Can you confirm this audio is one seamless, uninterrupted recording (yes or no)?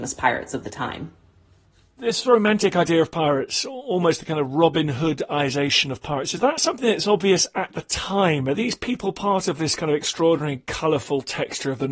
yes